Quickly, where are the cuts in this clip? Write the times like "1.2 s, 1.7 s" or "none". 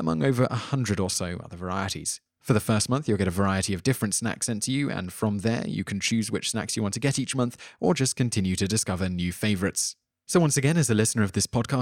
none